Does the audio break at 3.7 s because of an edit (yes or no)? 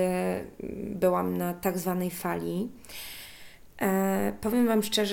no